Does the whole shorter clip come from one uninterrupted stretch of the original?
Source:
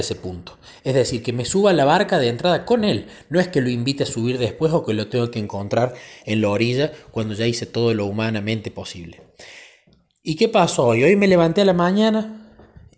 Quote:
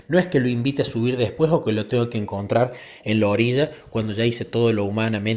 yes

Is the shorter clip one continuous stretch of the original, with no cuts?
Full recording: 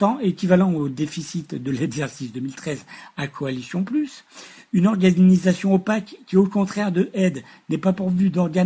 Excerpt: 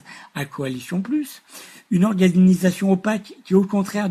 yes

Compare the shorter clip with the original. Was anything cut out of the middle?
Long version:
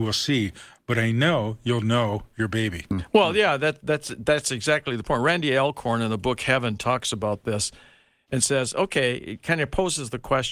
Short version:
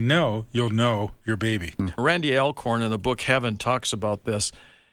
yes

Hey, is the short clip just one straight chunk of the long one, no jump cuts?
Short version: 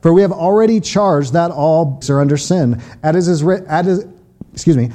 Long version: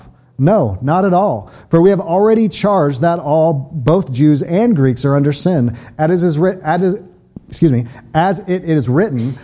no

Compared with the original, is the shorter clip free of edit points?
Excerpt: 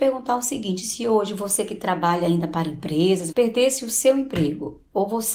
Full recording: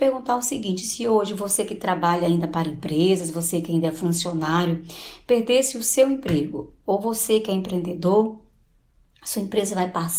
no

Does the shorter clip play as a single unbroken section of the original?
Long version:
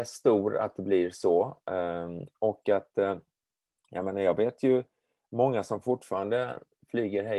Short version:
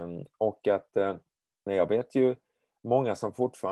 no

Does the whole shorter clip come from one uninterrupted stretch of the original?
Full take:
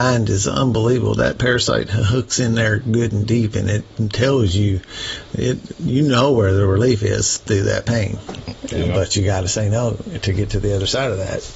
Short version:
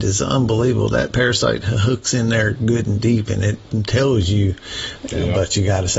no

